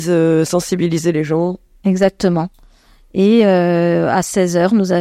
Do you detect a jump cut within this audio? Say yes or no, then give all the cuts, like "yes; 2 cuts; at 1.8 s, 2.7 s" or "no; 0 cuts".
no; 0 cuts